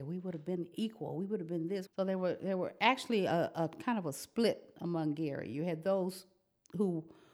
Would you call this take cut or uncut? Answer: cut